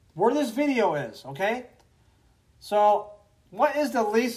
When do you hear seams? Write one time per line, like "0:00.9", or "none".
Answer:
none